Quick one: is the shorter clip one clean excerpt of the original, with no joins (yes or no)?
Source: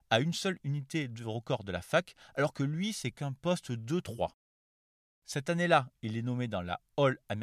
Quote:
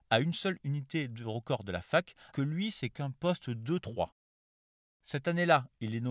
no